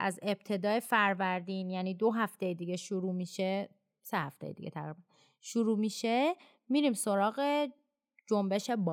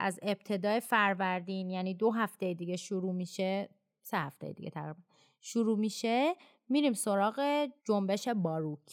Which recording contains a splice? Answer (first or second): second